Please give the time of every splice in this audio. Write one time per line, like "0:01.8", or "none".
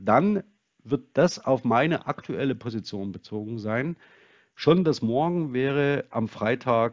none